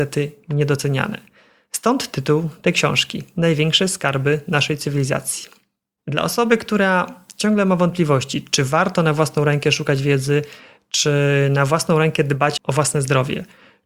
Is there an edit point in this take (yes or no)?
yes